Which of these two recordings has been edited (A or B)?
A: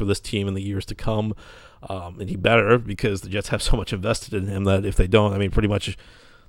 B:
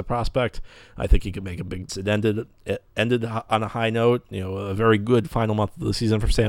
B